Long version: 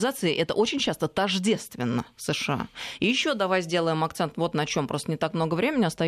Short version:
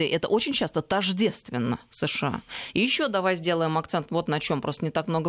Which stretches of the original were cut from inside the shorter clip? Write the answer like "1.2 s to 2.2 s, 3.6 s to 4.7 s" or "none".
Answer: none